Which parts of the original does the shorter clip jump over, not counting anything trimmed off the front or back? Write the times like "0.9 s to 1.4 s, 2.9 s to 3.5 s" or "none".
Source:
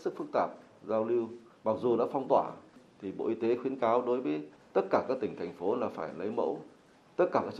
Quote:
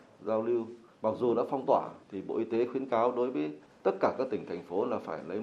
2.7 s to 2.9 s